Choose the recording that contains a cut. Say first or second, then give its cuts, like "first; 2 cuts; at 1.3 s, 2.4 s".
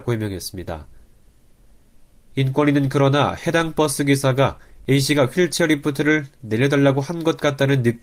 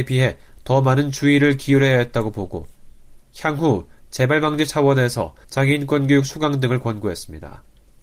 second; 1 cut; at 5.4 s